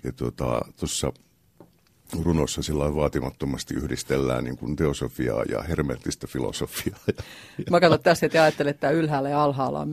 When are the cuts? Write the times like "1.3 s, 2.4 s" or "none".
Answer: none